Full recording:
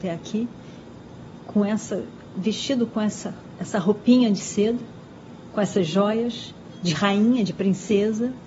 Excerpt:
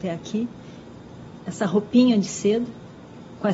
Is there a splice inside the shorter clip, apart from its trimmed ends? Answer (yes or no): yes